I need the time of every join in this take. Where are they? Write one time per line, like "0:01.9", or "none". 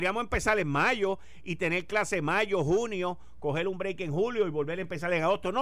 none